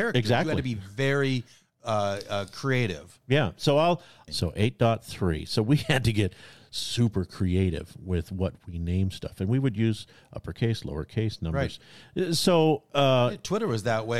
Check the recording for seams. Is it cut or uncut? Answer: cut